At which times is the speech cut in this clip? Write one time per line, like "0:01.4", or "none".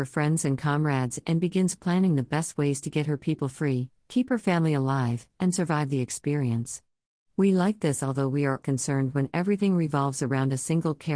0:08.6